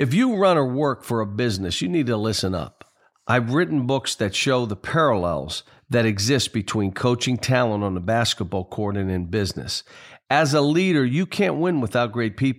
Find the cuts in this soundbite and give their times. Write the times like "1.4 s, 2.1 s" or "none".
none